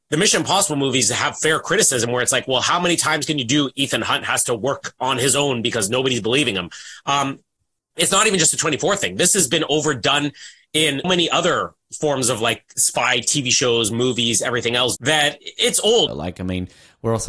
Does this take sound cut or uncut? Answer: cut